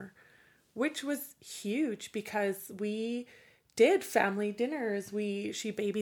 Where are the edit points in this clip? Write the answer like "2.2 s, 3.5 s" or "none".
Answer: none